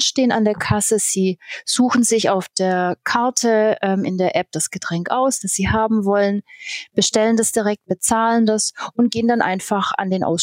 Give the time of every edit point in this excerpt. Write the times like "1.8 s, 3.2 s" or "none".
none